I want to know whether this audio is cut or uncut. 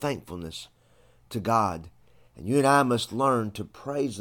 cut